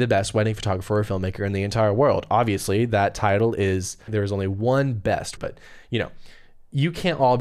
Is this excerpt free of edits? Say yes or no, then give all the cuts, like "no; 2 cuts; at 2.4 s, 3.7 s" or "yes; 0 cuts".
no; 2 cuts; at 4.1 s, 5.4 s